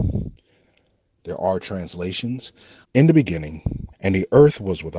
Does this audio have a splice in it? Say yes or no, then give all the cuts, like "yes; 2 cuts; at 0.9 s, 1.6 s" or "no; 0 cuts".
yes; 3 cuts; at 1.2 s, 2.8 s, 3.9 s